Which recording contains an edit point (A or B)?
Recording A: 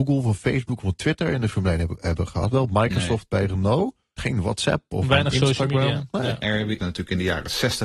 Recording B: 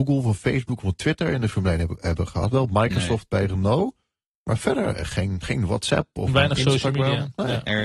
A